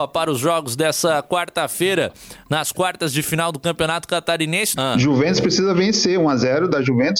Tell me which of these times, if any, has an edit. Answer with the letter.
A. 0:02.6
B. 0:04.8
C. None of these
B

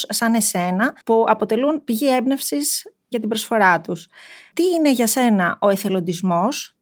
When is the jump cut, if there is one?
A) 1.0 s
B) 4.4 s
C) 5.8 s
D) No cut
A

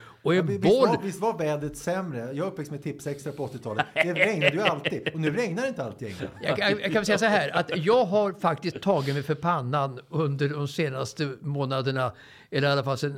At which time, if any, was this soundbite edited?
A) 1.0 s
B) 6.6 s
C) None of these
C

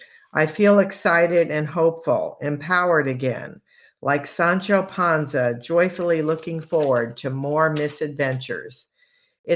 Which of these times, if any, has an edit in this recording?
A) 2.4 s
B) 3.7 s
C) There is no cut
C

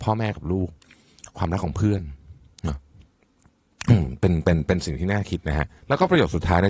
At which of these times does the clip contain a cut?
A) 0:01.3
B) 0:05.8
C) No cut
B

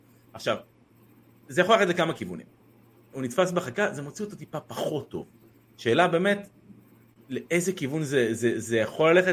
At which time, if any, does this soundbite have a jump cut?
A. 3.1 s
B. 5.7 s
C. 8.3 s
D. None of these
A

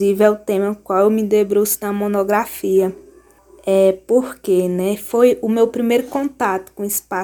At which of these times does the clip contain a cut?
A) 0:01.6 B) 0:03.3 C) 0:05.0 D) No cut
D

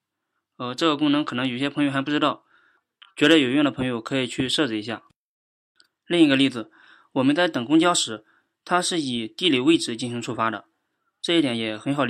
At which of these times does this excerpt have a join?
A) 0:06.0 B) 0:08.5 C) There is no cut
C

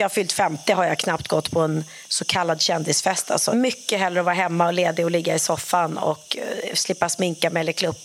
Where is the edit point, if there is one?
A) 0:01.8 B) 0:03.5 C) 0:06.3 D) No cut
B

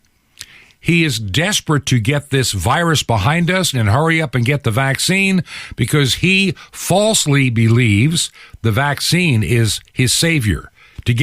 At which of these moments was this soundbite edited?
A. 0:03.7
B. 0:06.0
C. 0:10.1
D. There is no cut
A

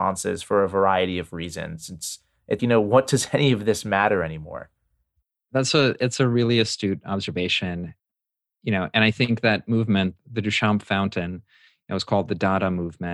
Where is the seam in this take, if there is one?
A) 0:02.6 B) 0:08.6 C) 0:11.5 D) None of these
A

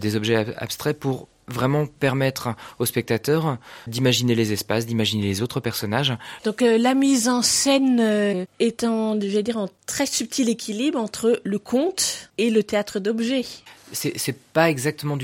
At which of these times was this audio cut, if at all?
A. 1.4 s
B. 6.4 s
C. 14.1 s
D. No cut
B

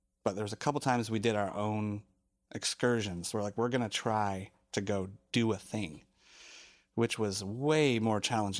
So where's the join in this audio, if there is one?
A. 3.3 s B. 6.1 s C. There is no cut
C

